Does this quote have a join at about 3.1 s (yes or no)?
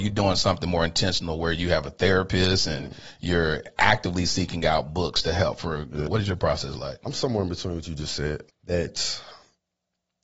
no